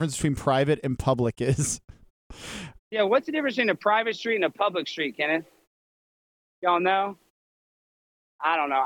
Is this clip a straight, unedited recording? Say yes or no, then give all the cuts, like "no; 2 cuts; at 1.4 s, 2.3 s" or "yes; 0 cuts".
yes; 0 cuts